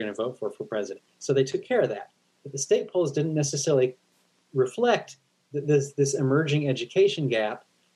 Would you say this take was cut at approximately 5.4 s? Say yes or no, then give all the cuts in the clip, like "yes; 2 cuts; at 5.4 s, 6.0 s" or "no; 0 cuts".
no; 1 cut; at 1.1 s